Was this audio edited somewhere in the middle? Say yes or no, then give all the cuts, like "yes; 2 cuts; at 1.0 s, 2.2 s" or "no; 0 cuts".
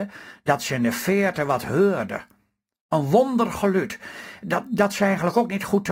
no; 0 cuts